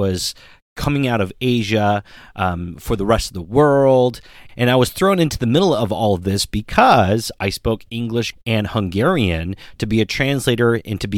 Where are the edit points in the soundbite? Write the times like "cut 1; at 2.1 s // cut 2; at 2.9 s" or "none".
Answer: cut 1; at 4.5 s // cut 2; at 8.3 s